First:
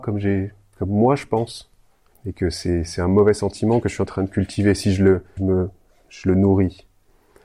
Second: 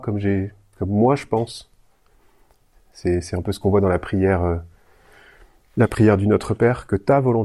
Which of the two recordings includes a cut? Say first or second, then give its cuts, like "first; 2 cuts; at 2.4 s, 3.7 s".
first; 2 cuts; at 2.1 s, 5.4 s